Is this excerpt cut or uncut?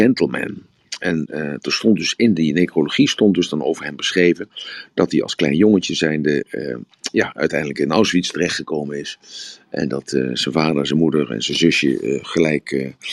uncut